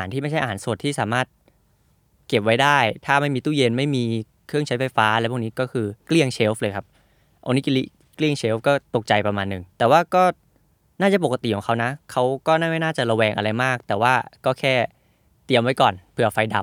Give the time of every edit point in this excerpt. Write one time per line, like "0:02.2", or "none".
0:06.0
0:09.7

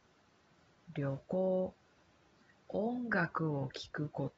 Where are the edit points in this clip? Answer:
0:02.6

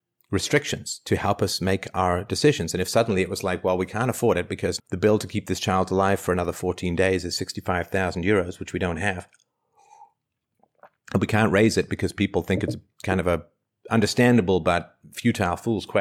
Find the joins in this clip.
0:04.8

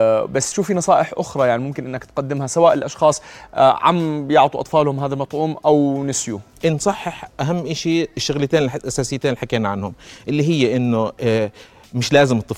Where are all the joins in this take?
none

